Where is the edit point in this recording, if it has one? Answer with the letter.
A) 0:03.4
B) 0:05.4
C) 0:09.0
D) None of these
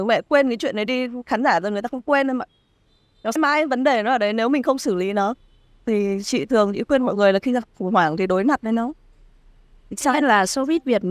A